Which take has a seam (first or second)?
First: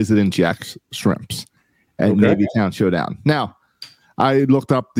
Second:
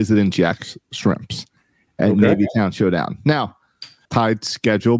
second